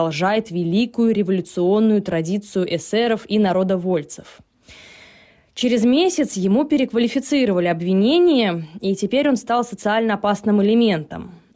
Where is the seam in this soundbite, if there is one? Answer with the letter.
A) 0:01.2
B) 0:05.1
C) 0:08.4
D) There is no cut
D